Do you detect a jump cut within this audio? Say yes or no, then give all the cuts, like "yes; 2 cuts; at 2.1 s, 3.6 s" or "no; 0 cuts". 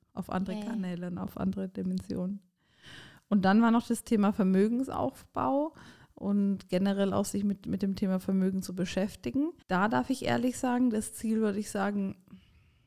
yes; 1 cut; at 9.6 s